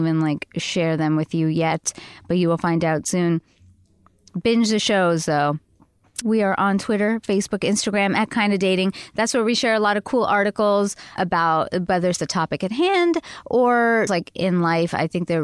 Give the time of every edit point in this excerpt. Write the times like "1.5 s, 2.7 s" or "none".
6.2 s, 11.2 s, 14.1 s